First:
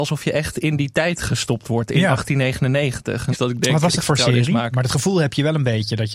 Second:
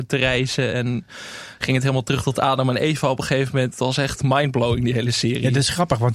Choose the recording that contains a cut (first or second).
first